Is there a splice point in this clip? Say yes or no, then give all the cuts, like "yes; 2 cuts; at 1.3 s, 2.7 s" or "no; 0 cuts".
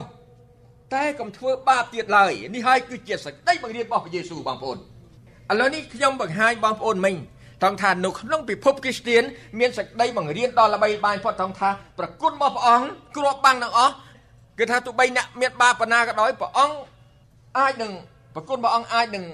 no; 0 cuts